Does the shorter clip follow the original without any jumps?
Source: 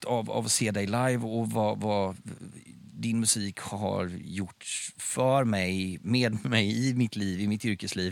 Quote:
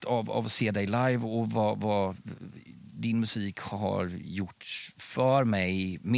yes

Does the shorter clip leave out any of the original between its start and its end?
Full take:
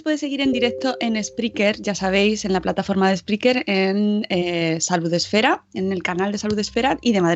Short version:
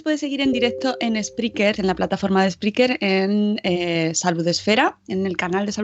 yes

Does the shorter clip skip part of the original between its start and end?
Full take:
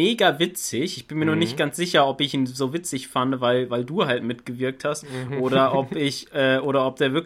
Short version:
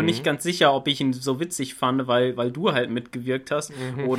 no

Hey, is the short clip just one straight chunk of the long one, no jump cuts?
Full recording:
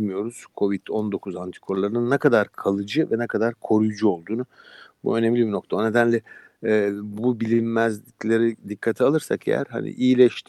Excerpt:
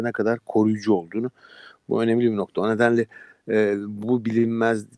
yes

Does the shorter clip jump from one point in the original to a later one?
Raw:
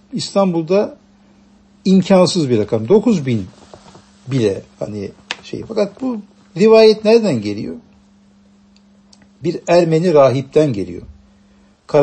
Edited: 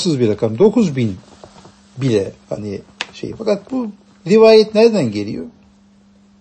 no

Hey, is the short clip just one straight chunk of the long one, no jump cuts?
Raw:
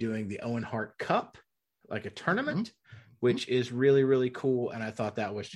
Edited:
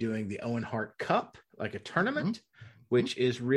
no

